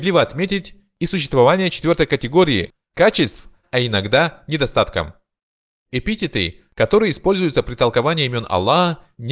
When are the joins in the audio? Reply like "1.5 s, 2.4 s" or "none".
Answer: 3.6 s, 5.8 s